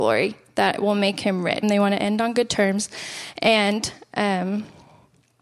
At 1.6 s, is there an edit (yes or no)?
yes